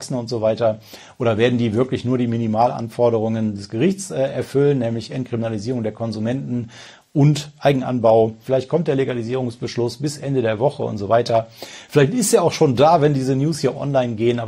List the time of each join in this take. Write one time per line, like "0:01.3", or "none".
0:08.4